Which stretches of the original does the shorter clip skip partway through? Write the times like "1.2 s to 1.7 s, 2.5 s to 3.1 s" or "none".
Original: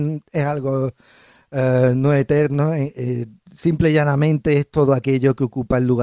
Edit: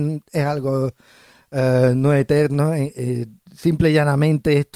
none